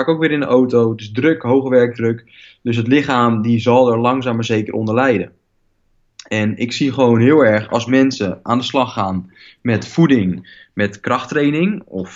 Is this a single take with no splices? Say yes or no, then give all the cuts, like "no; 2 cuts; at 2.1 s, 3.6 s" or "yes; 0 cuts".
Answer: yes; 0 cuts